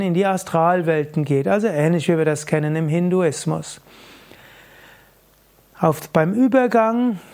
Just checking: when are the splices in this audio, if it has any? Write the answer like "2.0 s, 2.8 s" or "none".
none

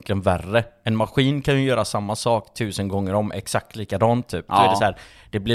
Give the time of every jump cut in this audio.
4.5 s

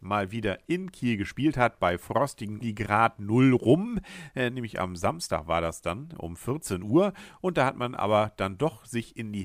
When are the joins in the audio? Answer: 2.6 s

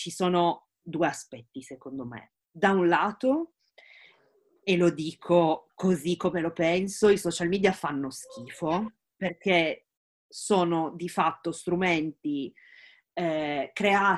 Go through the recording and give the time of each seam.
2.4 s

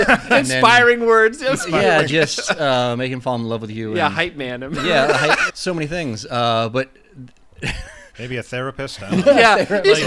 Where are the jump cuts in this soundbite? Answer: 5.5 s

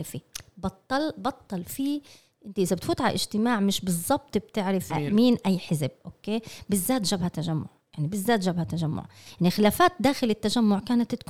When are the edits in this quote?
4.9 s

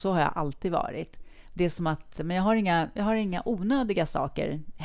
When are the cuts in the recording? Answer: 2.2 s

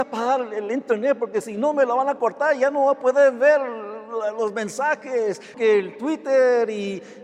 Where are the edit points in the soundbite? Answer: 5.5 s

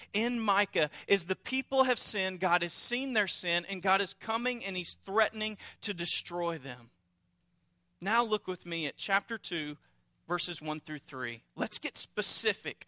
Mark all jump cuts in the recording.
none

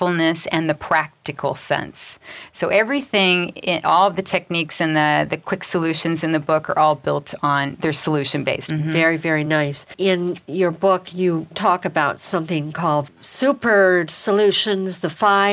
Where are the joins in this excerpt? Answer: 8.7 s, 11.5 s

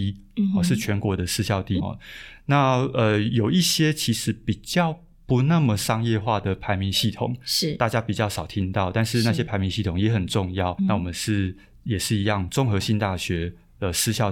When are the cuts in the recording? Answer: 1.8 s, 10.8 s

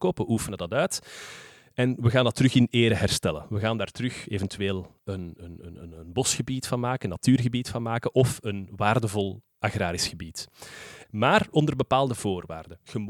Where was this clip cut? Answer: 5.0 s, 11.0 s

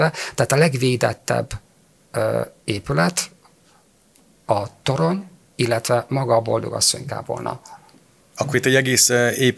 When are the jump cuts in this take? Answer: none

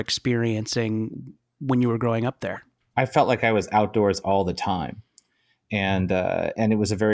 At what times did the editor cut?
2.8 s

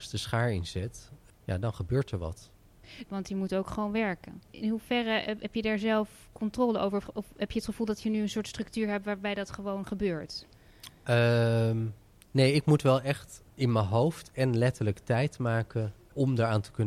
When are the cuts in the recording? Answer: 3.1 s

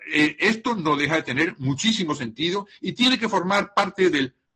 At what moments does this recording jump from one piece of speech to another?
none

